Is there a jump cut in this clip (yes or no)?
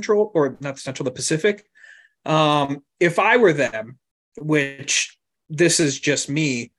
no